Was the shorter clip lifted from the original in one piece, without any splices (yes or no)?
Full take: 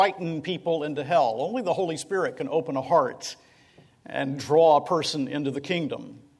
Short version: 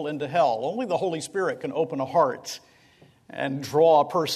yes